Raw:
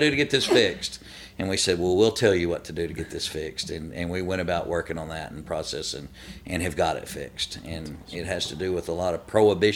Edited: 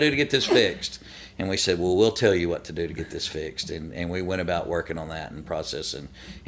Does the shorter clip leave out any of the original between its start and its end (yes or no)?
no